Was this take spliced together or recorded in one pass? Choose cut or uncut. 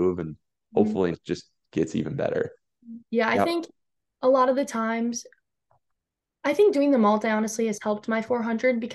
cut